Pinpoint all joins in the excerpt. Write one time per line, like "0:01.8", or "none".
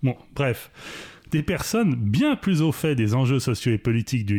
0:01.3